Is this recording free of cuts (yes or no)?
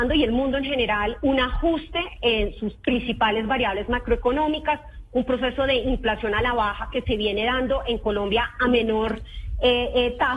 yes